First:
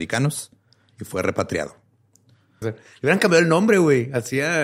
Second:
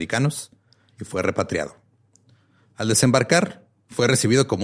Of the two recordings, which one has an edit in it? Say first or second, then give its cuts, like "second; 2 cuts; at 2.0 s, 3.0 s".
first; 1 cut; at 2.6 s